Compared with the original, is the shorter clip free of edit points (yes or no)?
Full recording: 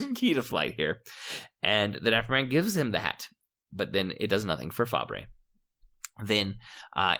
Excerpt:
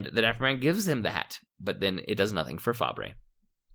no